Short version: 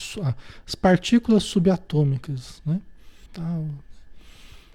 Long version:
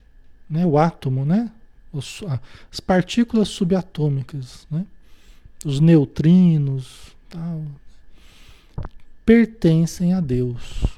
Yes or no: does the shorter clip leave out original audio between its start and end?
yes